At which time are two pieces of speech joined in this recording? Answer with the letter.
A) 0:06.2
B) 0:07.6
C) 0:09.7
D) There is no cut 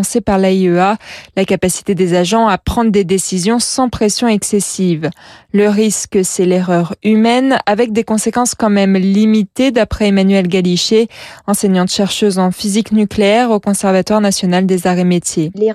D